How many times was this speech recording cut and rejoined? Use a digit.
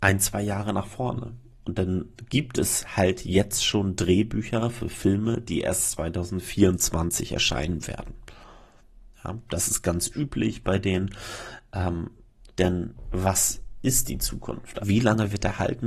2